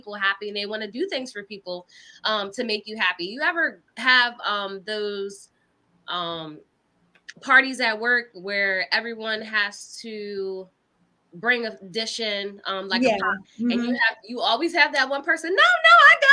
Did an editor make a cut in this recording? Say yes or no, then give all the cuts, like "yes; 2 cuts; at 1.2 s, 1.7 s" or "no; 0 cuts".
yes; 1 cut; at 13.4 s